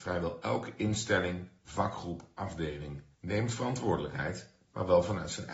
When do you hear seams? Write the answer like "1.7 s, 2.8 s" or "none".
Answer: 3.1 s